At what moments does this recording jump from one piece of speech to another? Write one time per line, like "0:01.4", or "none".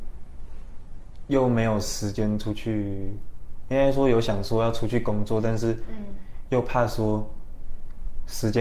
none